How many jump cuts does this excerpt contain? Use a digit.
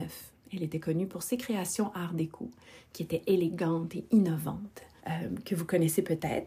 1